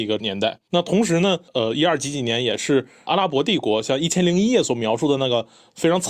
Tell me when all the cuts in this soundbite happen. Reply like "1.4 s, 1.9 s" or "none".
1.5 s